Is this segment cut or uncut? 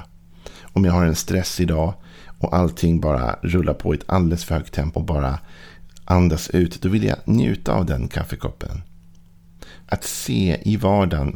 cut